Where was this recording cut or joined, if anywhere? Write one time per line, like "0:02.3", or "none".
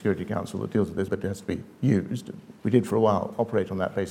0:01.1
0:02.6